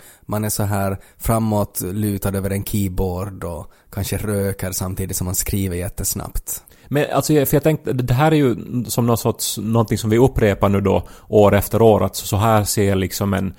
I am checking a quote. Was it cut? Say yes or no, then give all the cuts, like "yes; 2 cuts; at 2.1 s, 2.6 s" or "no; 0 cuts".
no; 0 cuts